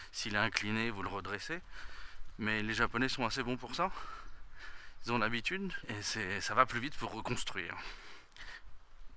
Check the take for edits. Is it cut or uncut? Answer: cut